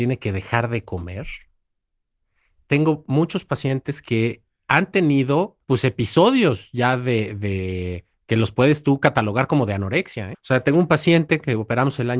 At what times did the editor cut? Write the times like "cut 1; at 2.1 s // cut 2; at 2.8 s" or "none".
cut 1; at 5.6 s // cut 2; at 10.3 s